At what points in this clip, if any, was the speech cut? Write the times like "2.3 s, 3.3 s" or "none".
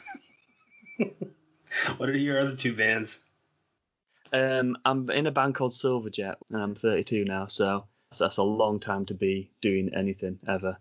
6.4 s, 8.1 s